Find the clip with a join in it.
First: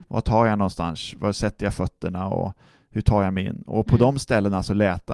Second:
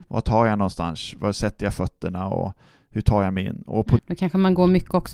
second; 1 cut; at 4.0 s

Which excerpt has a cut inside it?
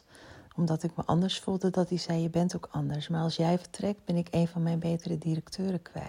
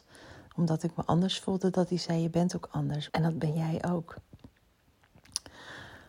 second; 1 cut; at 3.1 s

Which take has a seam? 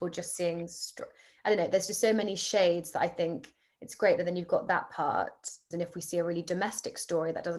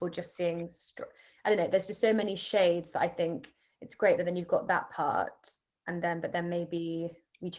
first; 1 cut; at 5.7 s

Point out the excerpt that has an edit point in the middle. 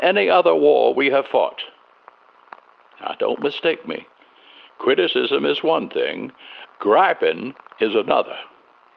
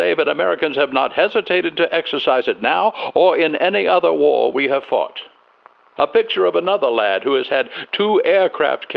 second; 1 cut; at 6.0 s

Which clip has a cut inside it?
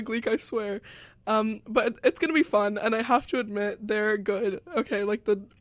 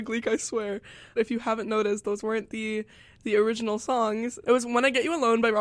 second; 2 cuts; at 1.2 s, 4.4 s

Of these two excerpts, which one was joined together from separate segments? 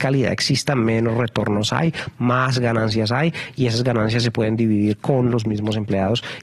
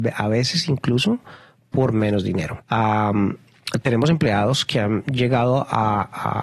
second; 1 cut; at 2.6 s

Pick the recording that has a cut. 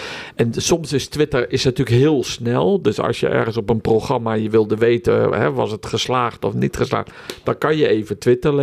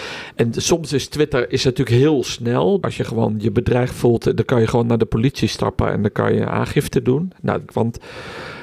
second; 2 cuts; at 2.8 s, 7.7 s

